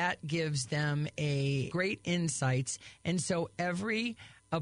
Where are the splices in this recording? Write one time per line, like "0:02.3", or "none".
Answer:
0:01.7